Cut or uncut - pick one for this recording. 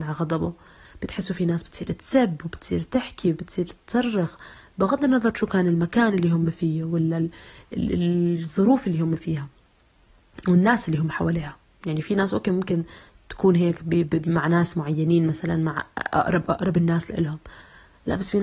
uncut